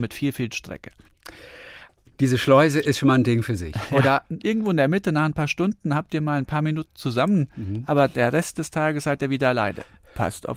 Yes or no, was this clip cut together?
yes